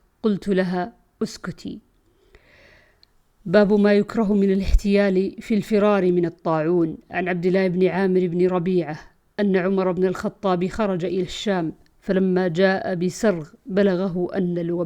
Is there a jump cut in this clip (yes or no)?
no